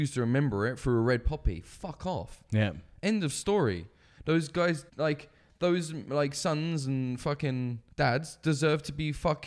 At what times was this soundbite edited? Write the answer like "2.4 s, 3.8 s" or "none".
4.9 s, 7.9 s